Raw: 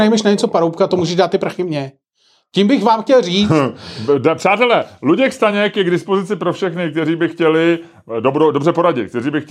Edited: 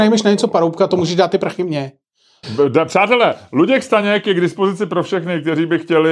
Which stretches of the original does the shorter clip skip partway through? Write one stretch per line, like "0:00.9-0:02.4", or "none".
0:02.4-0:03.9